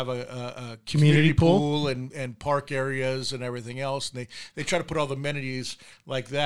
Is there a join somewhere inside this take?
no; 0 cuts

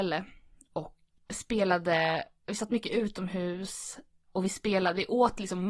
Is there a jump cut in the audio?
yes; 1 cut; at 1.2 s

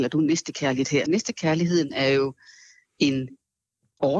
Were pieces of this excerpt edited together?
yes; 1 cut; at 1.1 s

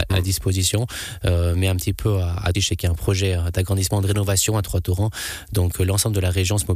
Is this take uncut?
no; 1 cut; at 2.5 s

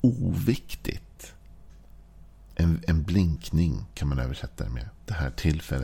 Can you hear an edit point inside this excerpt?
yes; 1 cut; at 2.5 s

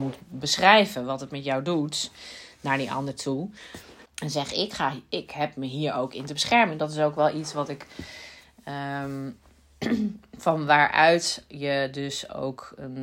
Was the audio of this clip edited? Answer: yes; 1 cut; at 4.1 s

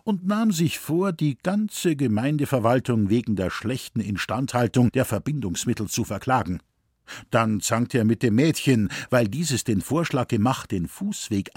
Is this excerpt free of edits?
yes; 0 cuts

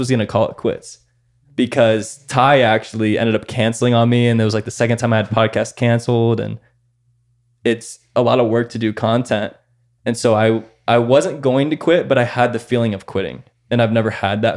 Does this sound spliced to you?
no; 0 cuts

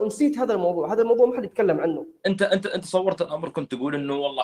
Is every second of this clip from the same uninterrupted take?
no; 1 cut; at 2.2 s

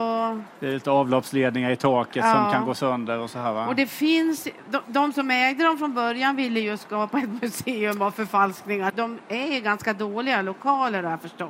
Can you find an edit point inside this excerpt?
yes; 1 cut; at 8.9 s

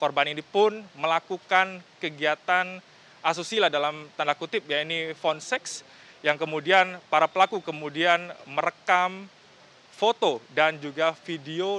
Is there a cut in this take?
no; 0 cuts

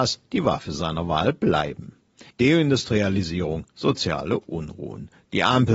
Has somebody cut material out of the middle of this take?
yes; 1 cut; at 2.3 s

